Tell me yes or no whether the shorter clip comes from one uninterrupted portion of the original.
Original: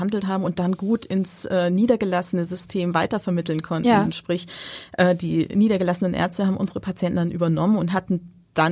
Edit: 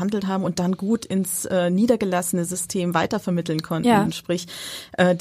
yes